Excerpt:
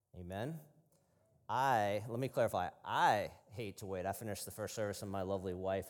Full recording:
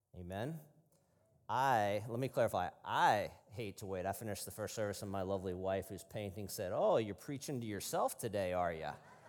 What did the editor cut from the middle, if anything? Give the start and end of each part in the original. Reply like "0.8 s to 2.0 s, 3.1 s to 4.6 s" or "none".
none